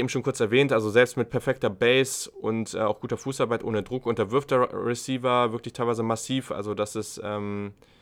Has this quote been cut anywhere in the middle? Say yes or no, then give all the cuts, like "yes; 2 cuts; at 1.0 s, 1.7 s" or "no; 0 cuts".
no; 0 cuts